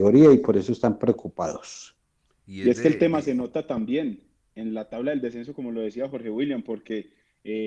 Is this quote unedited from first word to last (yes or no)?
no